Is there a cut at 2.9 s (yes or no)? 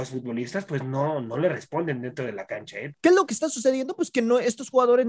yes